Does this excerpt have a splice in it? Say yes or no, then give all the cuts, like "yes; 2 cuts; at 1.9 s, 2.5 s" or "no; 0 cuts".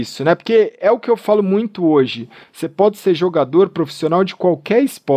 no; 0 cuts